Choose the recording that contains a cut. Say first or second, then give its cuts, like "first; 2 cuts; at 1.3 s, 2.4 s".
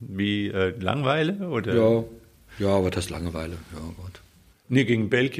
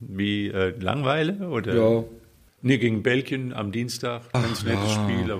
second; 2 cuts; at 2.5 s, 4.3 s